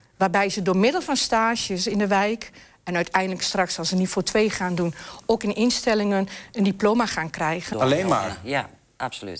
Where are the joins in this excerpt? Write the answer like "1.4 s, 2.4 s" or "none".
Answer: 7.7 s